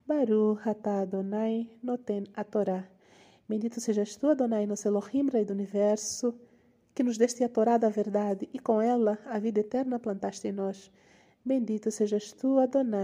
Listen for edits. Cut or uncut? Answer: uncut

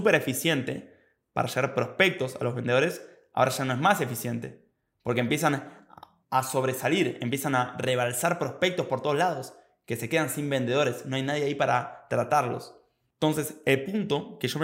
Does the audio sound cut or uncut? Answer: uncut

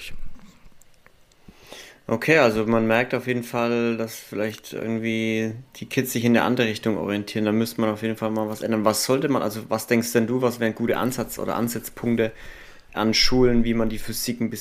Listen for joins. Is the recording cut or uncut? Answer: uncut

